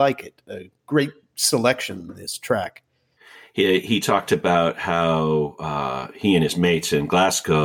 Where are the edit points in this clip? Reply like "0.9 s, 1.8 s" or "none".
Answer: none